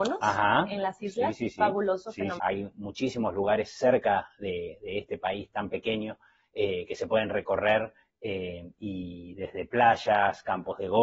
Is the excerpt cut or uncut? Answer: cut